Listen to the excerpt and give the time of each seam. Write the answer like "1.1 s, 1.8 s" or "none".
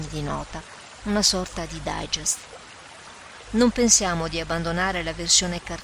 3.4 s